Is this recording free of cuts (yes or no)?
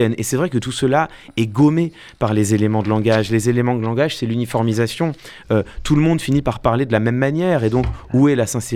yes